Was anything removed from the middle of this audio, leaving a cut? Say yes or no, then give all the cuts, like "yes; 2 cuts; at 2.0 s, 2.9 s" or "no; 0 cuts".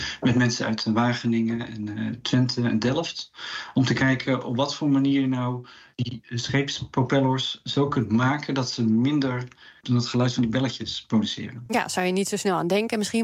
no; 0 cuts